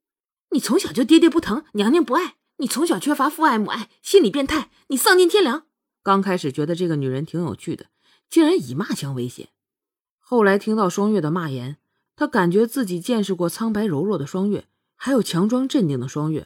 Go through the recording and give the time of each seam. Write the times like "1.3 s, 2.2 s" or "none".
6.0 s, 14.9 s